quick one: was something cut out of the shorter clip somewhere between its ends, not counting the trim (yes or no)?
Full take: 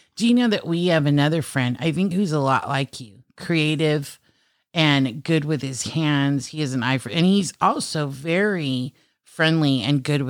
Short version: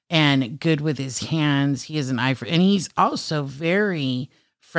no